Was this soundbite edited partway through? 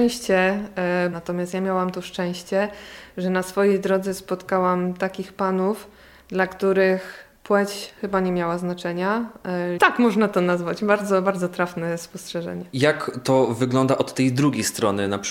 yes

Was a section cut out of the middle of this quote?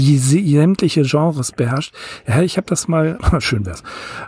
yes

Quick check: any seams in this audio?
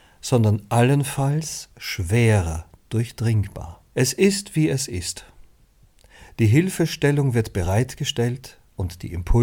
yes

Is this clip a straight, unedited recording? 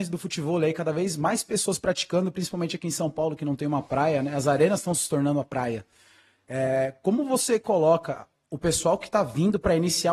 yes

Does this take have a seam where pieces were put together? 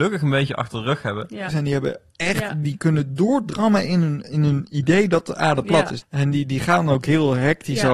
yes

